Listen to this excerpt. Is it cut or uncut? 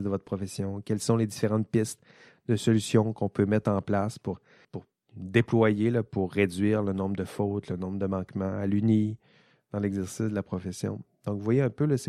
cut